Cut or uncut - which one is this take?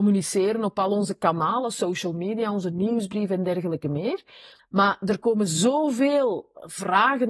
cut